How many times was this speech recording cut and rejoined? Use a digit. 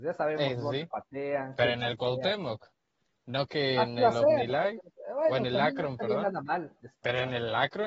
1